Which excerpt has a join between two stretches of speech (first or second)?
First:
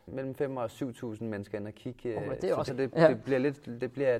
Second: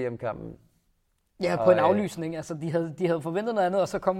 first